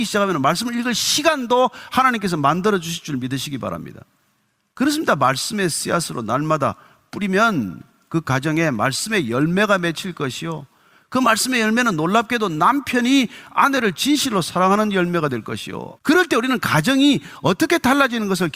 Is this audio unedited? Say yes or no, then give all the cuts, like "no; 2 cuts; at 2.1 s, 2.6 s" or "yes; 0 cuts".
no; 2 cuts; at 4.7 s, 16.0 s